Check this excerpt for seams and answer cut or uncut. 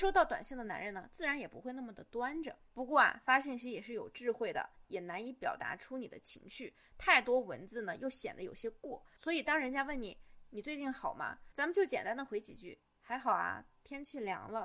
cut